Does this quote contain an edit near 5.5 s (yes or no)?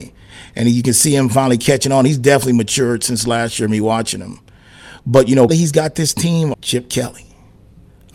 yes